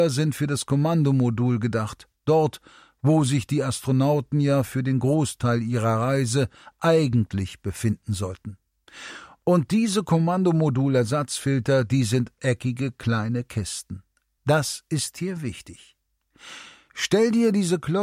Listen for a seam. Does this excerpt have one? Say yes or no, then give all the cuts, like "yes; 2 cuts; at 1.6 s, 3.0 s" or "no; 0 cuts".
yes; 1 cut; at 14.4 s